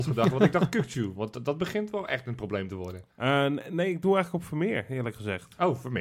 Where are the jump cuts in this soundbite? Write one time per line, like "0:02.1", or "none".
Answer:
0:03.1

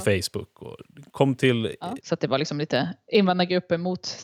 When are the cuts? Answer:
0:02.0

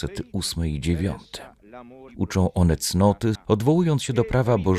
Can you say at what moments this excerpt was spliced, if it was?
0:02.1
0:03.4

